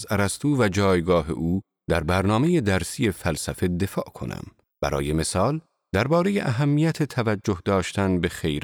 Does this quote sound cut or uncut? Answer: cut